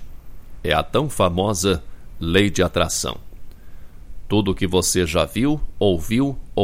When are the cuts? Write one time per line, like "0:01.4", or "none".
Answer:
none